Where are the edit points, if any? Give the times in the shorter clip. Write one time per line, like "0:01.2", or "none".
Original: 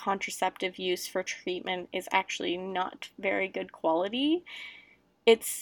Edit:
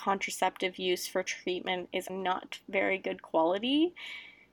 0:02.1